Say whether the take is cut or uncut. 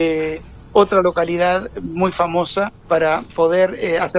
cut